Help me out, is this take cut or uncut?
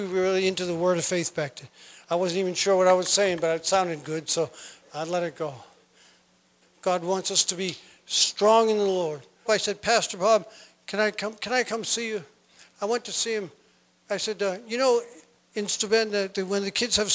cut